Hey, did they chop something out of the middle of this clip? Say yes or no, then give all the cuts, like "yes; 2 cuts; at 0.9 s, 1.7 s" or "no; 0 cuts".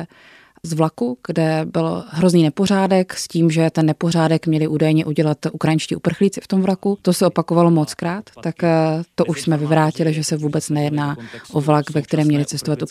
no; 0 cuts